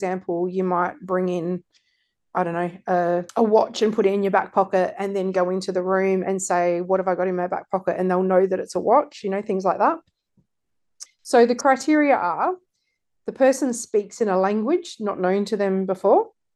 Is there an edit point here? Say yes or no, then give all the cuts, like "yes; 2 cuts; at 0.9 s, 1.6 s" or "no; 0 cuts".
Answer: yes; 1 cut; at 11.1 s